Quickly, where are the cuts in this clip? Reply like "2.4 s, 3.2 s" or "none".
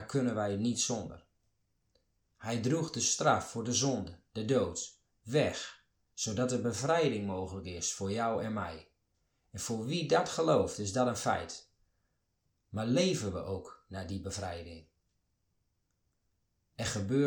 none